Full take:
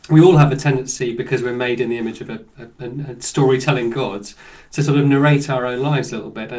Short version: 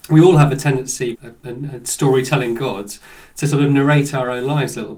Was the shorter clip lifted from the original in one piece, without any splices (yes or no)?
no